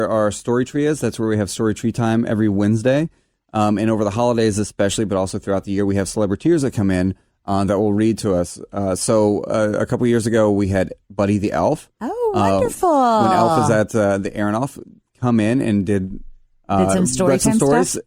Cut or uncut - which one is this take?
uncut